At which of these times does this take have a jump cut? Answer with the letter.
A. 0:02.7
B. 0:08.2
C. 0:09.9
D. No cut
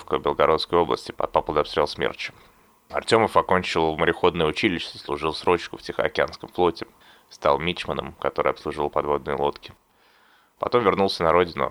B